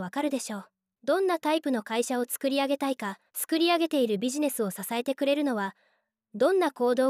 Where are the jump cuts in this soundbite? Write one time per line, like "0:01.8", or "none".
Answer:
0:00.9
0:03.3